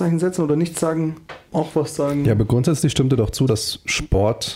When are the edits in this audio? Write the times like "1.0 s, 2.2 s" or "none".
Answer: 1.5 s, 3.5 s